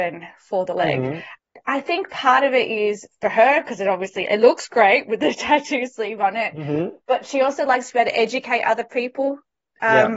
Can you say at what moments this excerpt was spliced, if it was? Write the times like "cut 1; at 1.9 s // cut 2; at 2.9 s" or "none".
none

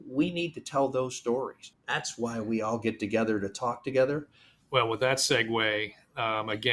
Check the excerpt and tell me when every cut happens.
cut 1; at 1.7 s // cut 2; at 4.6 s

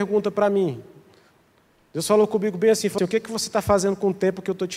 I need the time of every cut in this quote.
cut 1; at 3.0 s

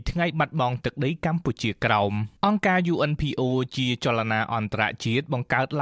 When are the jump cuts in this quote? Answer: cut 1; at 2.4 s

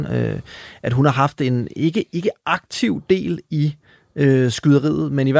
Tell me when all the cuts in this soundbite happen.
none

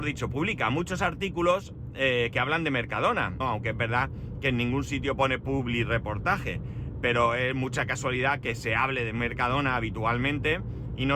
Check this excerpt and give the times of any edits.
cut 1; at 3.4 s

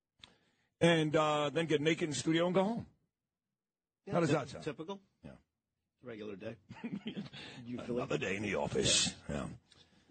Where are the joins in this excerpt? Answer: none

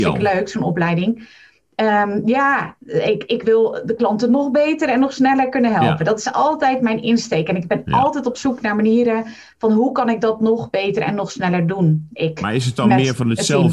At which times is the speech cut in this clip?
none

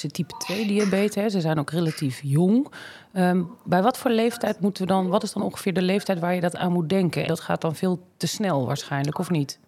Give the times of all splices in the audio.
cut 1; at 7.3 s

